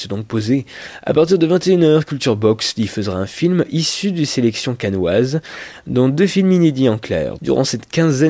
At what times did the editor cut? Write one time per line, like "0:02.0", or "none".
0:07.4